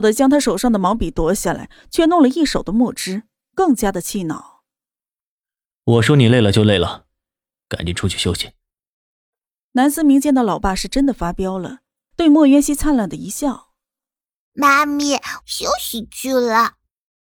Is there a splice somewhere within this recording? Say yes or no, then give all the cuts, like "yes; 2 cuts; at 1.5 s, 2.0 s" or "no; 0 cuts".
yes; 2 cuts; at 12.1 s, 15.4 s